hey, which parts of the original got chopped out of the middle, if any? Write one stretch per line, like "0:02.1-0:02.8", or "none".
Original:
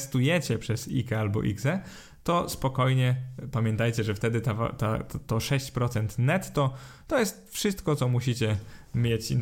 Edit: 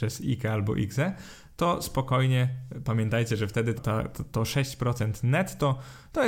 0:04.4-0:04.7